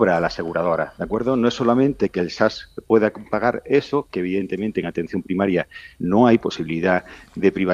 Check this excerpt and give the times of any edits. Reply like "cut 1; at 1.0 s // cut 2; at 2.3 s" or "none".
cut 1; at 0.9 s